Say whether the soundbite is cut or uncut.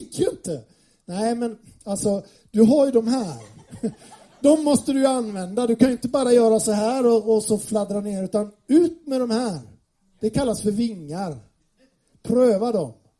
uncut